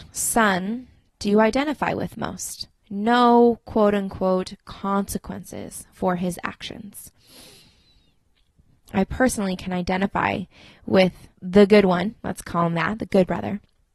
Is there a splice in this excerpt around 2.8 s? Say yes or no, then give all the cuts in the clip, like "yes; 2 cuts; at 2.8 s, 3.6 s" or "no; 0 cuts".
yes; 2 cuts; at 2.8 s, 11.3 s